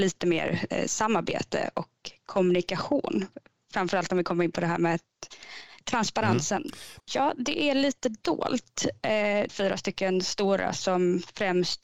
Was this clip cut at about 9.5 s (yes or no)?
yes